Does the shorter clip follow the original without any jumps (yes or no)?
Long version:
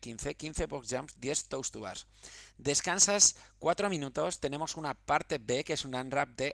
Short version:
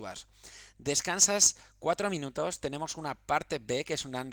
yes